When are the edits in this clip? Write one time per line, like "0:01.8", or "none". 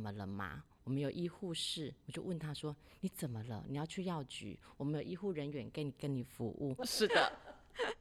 0:02.0
0:06.8